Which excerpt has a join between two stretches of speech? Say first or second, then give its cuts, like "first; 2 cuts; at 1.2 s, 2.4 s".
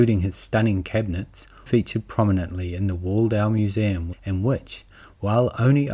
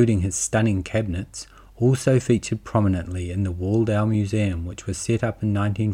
first; 2 cuts; at 1.7 s, 4.1 s